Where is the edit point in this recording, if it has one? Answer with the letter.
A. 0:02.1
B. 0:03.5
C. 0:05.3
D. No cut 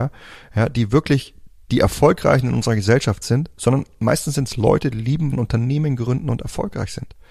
C